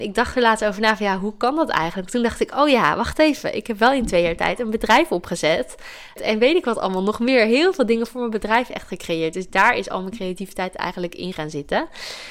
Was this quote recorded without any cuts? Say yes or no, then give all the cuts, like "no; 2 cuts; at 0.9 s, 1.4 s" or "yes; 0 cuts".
no; 1 cut; at 6.2 s